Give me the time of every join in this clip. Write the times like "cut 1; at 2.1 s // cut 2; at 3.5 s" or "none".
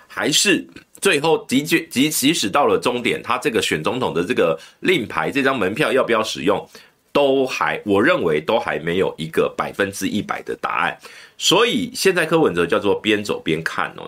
none